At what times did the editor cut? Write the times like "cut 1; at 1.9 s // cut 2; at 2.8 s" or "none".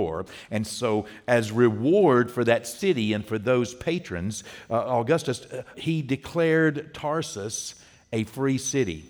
cut 1; at 5.7 s